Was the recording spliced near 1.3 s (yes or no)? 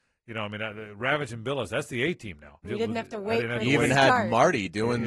no